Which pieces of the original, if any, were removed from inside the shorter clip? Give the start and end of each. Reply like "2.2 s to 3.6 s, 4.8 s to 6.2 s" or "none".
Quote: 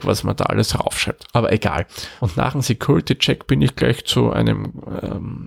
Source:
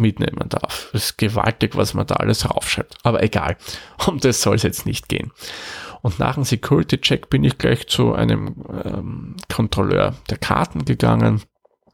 3.9 s to 6.0 s